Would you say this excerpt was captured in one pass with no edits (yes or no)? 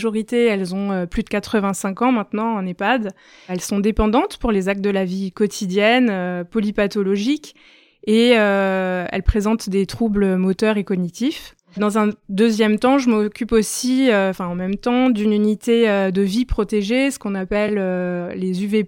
yes